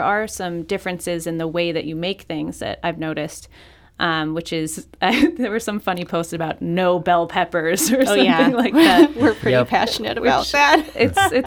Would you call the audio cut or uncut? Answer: uncut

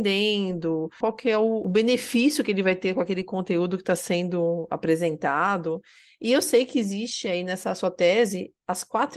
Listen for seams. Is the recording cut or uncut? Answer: cut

